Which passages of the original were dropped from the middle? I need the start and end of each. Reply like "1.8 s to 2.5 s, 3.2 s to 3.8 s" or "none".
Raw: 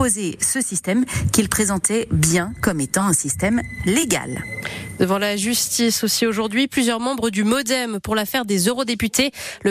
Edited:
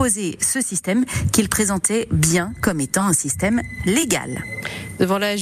none